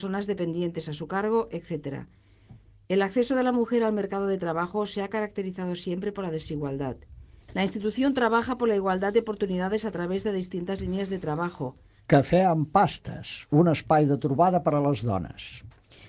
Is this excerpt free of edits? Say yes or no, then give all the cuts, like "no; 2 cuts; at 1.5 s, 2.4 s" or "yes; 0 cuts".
no; 2 cuts; at 7.4 s, 12.0 s